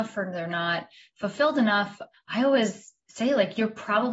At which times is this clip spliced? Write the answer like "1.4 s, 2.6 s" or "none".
2.1 s